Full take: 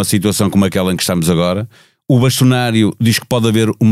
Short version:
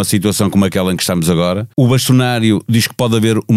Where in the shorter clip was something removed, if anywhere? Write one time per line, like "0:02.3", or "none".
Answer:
0:01.7